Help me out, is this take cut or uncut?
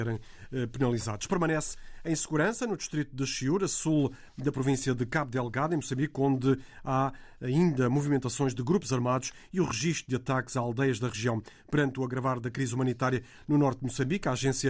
uncut